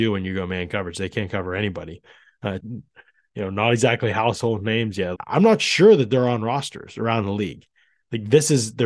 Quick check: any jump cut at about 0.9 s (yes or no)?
no